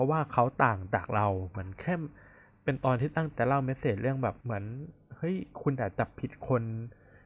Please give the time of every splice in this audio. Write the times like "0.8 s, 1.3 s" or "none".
3.3 s, 4.4 s